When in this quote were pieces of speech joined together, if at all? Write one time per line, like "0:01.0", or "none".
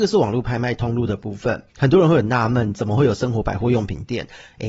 0:01.7